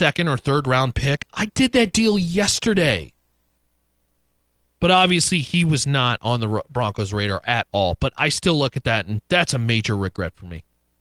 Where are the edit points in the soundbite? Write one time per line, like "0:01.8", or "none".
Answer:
none